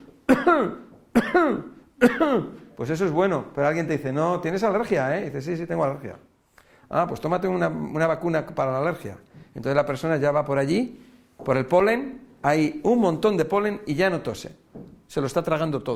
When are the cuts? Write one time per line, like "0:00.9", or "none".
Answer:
none